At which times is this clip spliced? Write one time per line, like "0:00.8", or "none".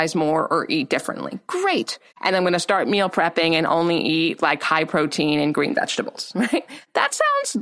0:02.1